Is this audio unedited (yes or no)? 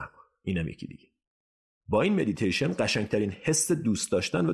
yes